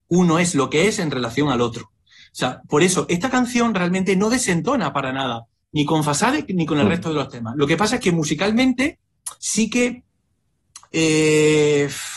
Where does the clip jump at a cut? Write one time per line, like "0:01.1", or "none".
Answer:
0:09.4